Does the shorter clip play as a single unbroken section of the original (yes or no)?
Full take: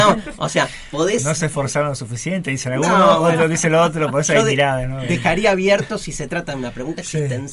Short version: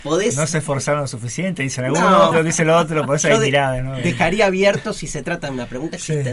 no